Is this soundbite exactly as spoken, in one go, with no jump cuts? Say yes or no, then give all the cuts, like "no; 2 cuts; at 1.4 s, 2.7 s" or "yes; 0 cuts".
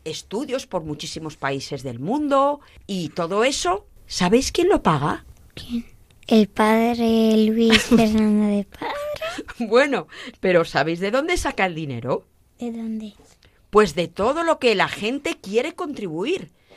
no; 1 cut; at 10.3 s